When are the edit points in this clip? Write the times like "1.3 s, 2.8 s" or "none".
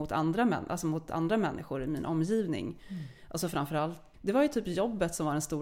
4.1 s

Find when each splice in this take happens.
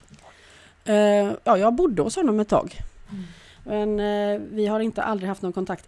1.4 s, 3.1 s

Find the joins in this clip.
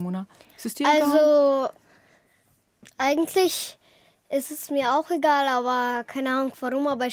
none

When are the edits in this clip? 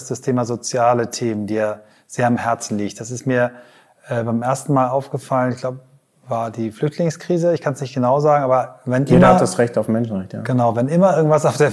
none

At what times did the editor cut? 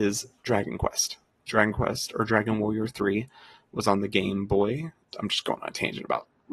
1.5 s, 5.1 s

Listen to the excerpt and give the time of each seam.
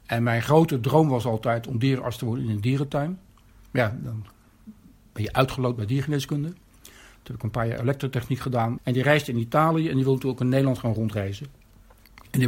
8.8 s

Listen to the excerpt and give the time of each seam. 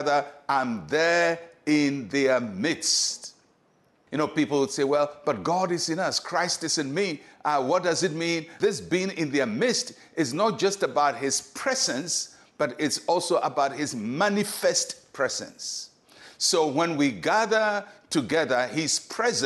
8.6 s

